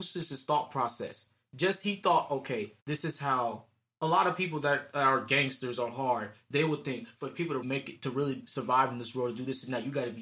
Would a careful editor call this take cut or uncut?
cut